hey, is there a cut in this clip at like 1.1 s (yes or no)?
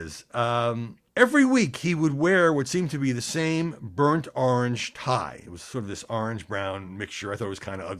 yes